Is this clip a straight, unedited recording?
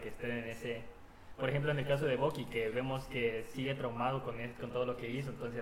yes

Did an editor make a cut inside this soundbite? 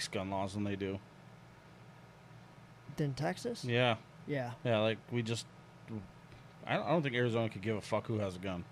no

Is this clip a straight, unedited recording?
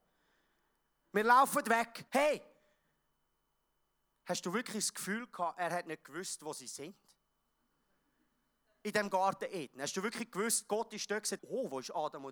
no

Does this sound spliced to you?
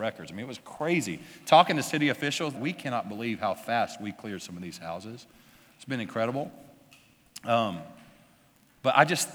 yes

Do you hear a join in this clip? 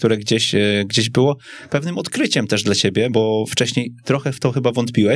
yes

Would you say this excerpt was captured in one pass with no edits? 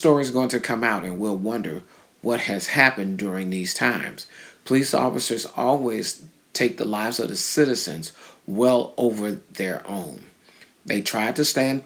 yes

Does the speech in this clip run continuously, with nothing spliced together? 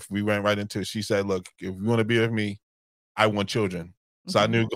yes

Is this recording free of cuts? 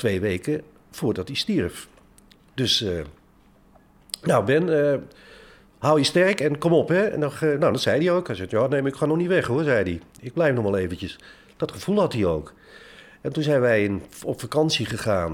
yes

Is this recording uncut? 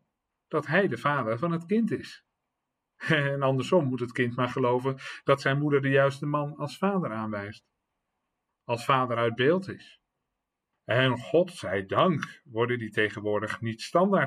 no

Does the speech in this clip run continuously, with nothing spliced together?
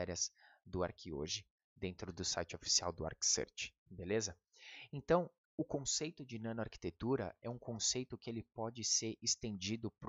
yes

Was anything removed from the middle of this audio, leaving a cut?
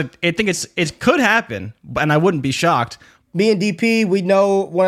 yes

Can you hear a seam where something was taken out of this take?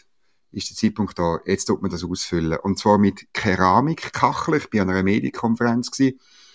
no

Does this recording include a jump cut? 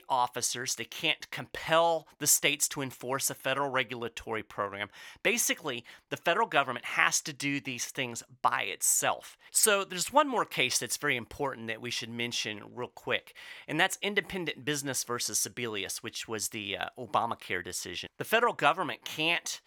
yes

